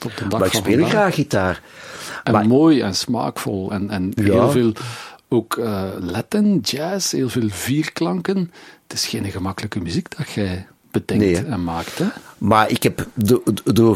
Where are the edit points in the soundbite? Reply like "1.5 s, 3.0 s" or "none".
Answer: none